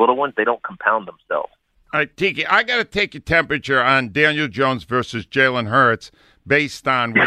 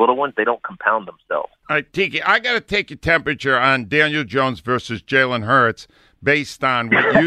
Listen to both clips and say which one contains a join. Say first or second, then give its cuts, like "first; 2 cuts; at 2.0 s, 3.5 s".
second; 1 cut; at 1.6 s